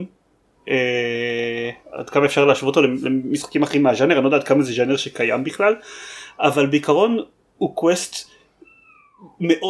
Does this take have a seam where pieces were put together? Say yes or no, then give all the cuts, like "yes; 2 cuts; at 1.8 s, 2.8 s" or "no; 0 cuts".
no; 0 cuts